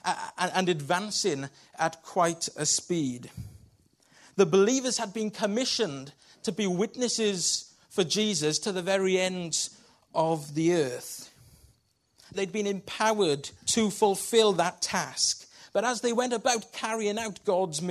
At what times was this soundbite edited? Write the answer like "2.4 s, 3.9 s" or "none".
12.3 s, 13.6 s